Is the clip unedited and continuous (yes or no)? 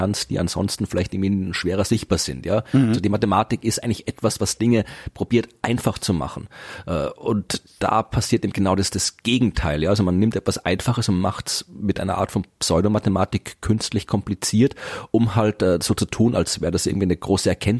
yes